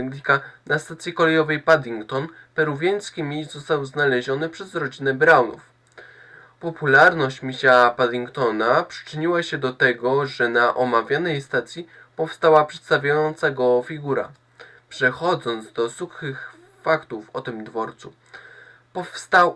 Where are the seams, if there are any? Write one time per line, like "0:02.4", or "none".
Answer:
none